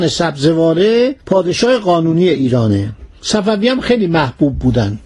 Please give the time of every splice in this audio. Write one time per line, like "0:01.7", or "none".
0:01.2